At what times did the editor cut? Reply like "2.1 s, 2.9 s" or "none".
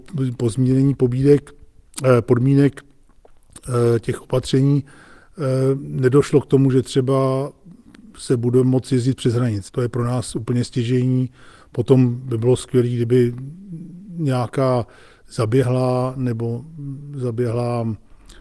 9.7 s